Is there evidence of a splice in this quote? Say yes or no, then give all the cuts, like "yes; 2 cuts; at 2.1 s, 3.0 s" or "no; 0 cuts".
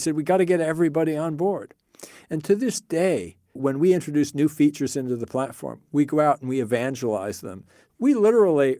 yes; 1 cut; at 3.6 s